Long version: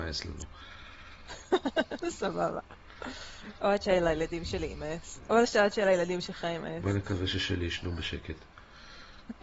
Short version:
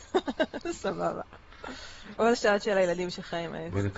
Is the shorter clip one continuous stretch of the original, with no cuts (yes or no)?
no